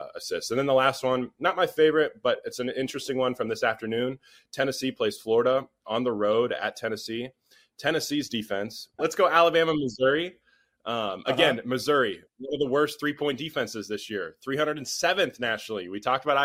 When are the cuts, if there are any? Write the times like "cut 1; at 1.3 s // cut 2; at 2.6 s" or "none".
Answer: cut 1; at 9.0 s